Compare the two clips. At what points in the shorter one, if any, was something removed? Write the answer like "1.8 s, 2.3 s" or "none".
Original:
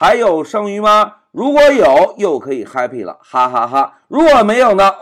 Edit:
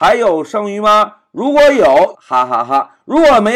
2.1 s